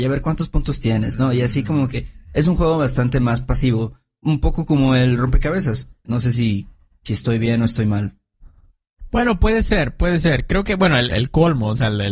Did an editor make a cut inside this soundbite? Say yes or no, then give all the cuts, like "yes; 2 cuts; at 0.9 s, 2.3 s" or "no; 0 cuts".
yes; 2 cuts; at 6.1 s, 11.1 s